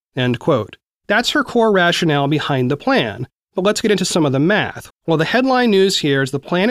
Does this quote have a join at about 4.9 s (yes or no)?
yes